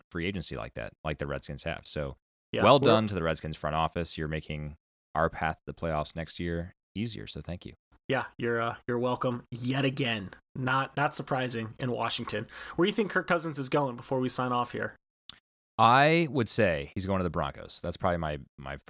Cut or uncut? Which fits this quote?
uncut